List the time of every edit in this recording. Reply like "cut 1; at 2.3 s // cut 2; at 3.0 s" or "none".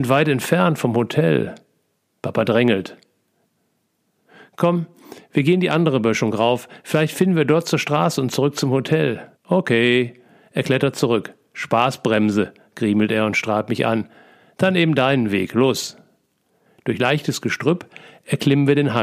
cut 1; at 9.3 s